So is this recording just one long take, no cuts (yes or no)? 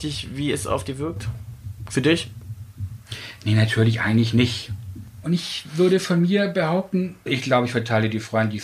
no